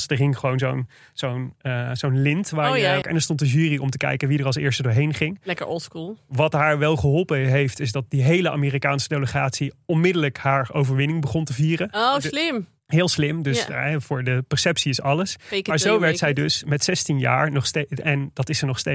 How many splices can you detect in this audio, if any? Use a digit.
1